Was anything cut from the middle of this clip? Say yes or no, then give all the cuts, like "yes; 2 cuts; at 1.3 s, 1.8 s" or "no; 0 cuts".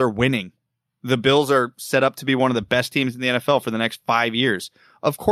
no; 0 cuts